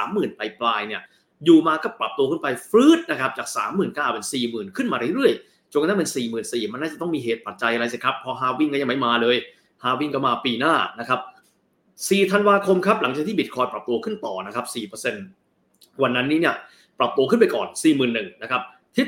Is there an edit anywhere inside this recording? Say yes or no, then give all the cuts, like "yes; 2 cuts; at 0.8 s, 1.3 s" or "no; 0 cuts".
no; 0 cuts